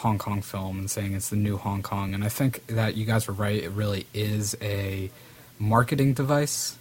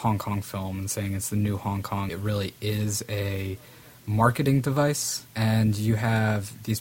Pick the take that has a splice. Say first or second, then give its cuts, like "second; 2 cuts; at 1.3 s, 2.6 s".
second; 2 cuts; at 2.1 s, 5.3 s